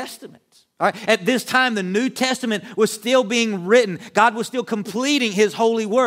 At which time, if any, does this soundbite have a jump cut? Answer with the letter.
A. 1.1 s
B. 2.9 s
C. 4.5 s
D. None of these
A